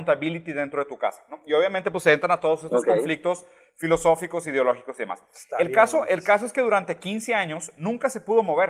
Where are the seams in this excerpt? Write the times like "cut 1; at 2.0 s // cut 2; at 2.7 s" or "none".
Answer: none